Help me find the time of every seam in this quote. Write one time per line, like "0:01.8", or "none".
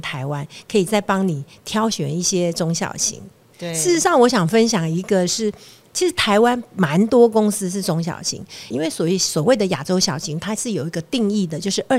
0:08.7